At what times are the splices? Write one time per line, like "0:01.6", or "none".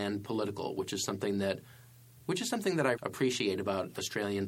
0:02.9